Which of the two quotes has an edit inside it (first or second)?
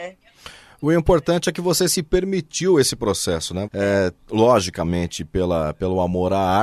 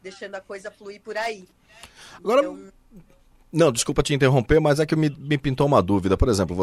first